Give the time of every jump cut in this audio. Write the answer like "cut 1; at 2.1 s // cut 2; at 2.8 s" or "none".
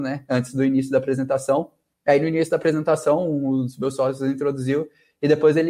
none